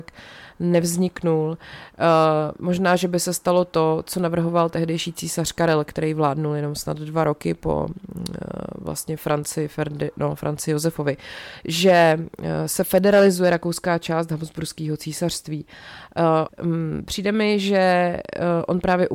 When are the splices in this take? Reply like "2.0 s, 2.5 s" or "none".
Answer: 16.5 s